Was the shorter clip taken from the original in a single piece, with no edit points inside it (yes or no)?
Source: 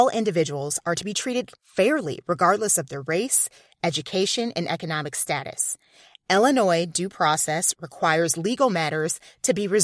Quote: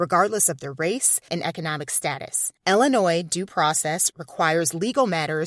no